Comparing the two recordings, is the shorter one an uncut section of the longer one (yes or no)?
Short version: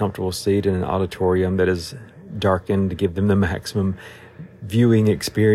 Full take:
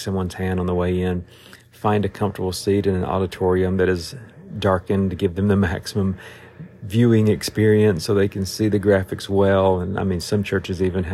yes